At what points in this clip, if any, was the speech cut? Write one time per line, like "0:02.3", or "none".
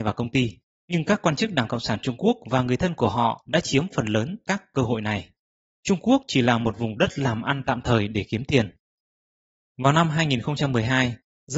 0:05.8